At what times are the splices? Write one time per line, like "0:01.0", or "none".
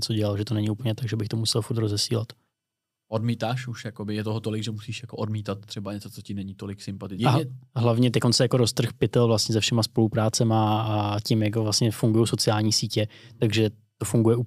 0:07.2